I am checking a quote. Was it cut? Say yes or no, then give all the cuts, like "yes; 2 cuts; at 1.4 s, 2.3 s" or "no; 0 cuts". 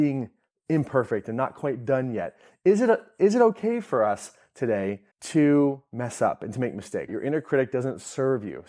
yes; 2 cuts; at 5.1 s, 7.1 s